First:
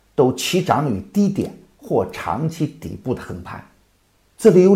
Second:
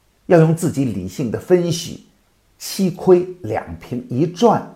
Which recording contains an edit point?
second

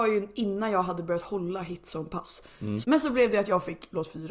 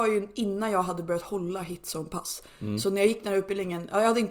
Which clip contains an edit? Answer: first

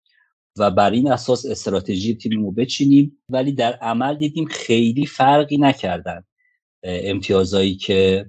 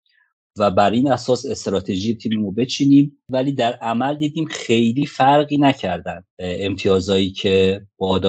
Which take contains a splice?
second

